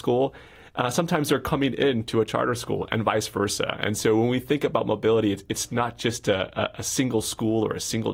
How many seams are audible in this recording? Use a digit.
0